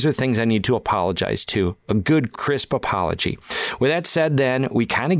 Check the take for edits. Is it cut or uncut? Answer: cut